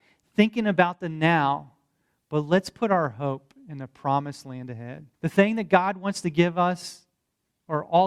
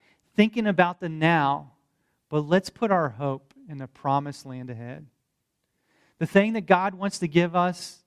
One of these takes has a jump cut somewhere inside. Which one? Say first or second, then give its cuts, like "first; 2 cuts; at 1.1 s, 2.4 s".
first; 1 cut; at 5.1 s